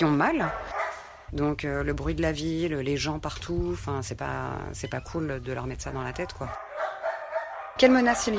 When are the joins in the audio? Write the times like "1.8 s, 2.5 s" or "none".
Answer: 1.3 s